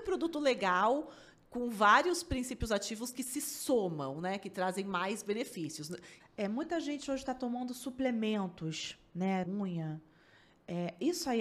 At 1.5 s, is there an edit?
no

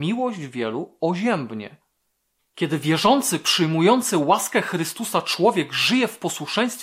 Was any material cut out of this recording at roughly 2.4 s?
yes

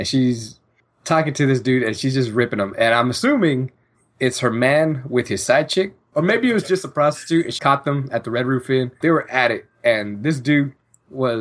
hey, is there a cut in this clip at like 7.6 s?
yes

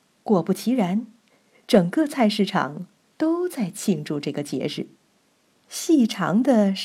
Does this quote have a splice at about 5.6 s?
yes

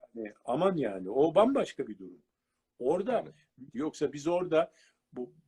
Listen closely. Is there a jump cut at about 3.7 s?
yes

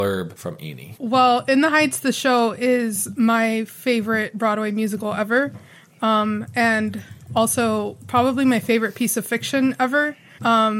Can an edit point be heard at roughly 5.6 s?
no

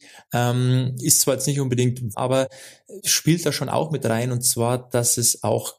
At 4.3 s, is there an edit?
no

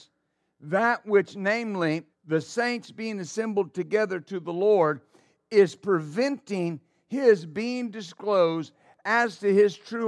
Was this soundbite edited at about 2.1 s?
yes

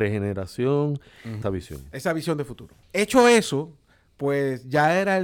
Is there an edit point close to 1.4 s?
yes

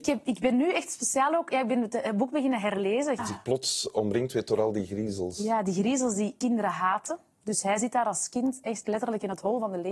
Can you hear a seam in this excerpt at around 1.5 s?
no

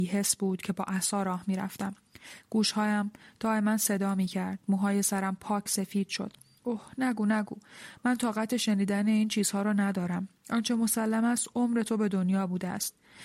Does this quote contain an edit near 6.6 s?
yes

